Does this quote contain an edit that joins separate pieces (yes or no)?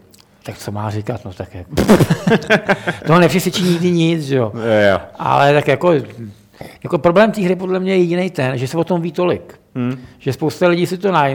no